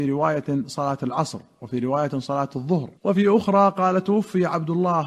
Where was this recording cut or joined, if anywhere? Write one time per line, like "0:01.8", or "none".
0:03.0